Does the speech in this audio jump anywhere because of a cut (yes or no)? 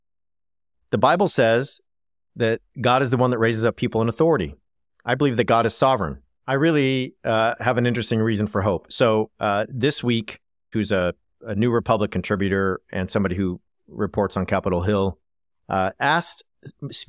yes